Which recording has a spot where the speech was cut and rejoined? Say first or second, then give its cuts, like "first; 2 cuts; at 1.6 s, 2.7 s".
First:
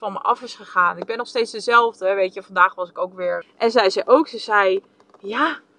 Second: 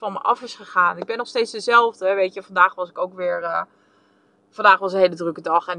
first; 1 cut; at 3.4 s